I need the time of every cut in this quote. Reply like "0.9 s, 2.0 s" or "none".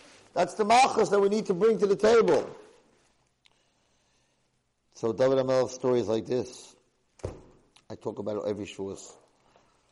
none